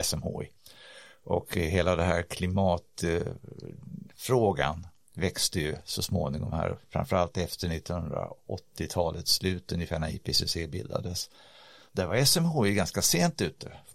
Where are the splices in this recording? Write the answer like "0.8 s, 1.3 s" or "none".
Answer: none